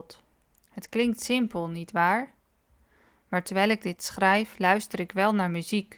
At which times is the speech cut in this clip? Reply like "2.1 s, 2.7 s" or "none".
none